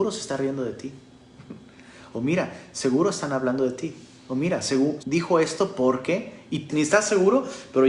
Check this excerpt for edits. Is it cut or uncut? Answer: cut